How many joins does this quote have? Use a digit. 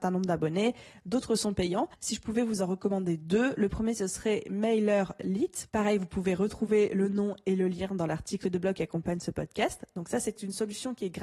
0